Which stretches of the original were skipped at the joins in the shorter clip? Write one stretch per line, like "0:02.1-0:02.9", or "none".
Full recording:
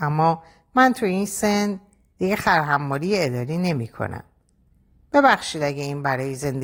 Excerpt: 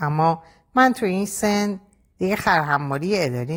none

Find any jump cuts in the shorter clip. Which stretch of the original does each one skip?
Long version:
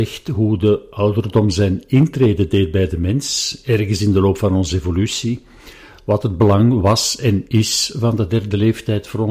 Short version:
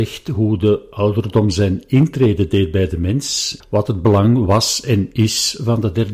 0:03.6-0:06.0

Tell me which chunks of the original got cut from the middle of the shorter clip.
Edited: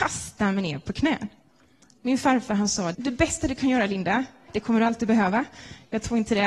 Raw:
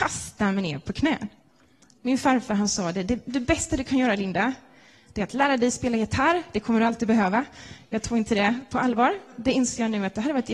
0:02.9-0:03.2
0:04.8-0:06.5

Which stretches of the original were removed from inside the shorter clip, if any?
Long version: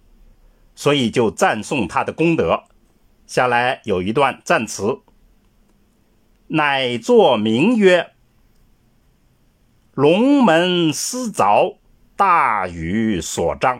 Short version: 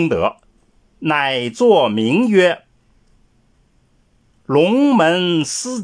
0:03.2-0:06.4

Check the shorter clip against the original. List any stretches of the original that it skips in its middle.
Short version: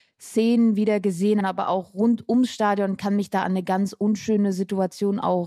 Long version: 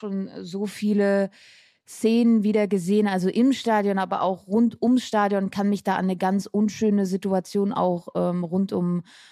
0:03.1-0:03.9

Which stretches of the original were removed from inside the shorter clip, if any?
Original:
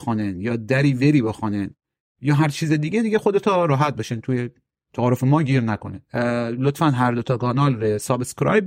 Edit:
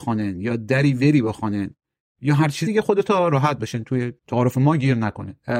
0:02.7-0:03.0
0:04.5-0:04.8

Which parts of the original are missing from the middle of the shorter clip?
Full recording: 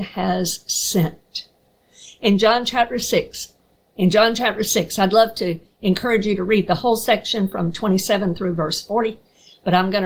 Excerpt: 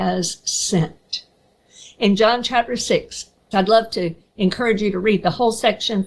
0:03.7-0:05.0

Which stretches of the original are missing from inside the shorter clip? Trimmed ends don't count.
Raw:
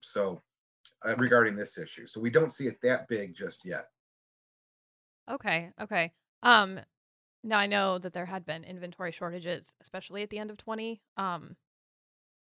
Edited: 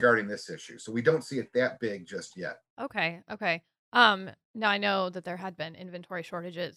0:04.0-0:05.2
0:06.9-0:07.3

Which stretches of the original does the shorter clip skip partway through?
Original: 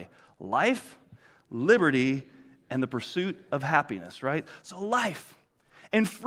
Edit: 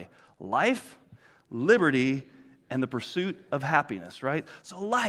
none

